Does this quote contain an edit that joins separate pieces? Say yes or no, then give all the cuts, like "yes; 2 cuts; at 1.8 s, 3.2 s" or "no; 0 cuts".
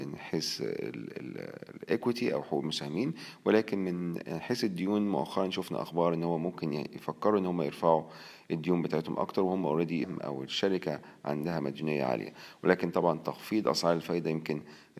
yes; 1 cut; at 10.0 s